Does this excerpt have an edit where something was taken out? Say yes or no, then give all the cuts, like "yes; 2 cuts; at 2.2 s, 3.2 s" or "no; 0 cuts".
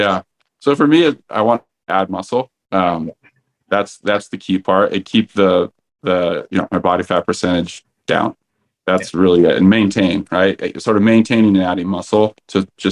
no; 0 cuts